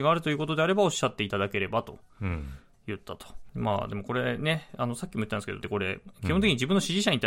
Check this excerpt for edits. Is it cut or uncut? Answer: cut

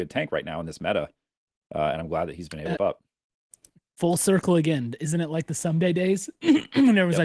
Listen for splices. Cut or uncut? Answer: cut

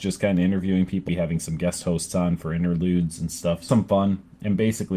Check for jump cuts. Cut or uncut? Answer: cut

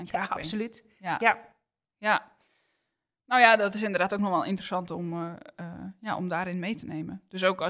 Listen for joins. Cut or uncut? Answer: uncut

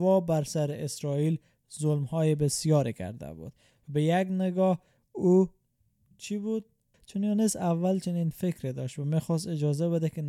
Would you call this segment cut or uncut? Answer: cut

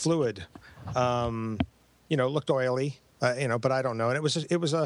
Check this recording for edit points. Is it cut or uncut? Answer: uncut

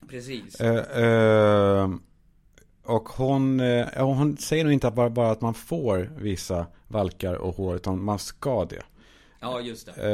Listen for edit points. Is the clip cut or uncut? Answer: uncut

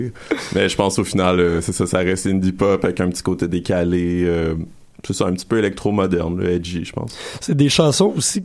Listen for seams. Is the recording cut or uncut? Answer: uncut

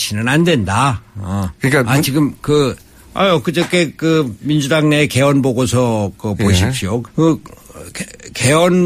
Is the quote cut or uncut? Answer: cut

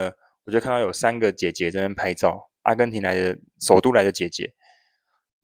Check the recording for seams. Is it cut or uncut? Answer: uncut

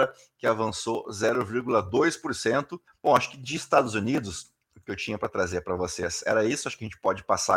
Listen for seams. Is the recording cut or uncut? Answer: cut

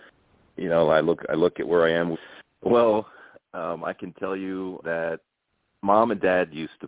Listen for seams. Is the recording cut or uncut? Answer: cut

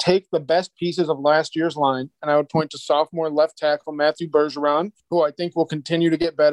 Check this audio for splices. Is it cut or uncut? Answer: uncut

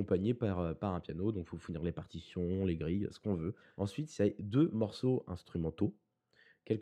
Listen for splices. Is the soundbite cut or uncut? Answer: uncut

